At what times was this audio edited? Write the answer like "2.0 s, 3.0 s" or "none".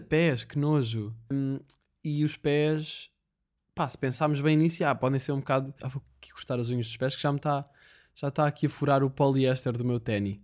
1.3 s, 5.8 s